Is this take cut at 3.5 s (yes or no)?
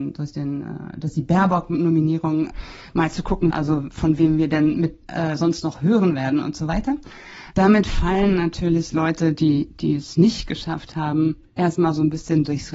yes